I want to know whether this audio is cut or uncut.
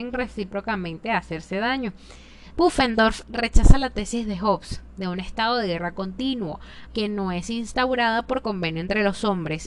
cut